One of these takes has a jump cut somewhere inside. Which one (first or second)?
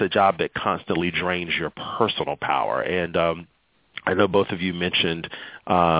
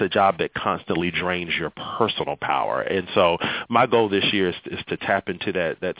first